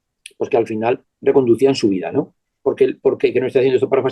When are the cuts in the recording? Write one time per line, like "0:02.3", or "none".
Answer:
0:02.6